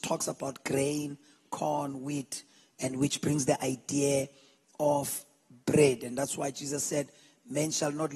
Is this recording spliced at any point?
no; 0 cuts

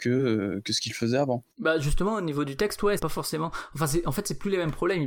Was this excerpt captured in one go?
no; 2 cuts; at 1.5 s, 3.0 s

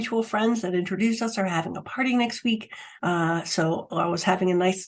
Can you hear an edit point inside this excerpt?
yes; 1 cut; at 3.0 s

